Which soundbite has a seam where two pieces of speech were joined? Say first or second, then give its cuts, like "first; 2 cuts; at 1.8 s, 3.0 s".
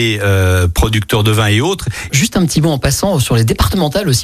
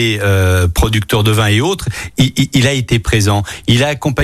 first; 1 cut; at 2.1 s